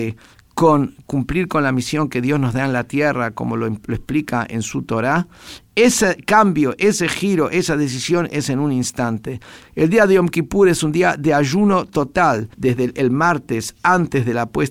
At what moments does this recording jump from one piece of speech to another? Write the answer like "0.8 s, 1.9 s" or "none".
9.6 s, 12.5 s